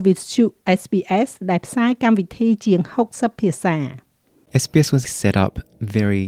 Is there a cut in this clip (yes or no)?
no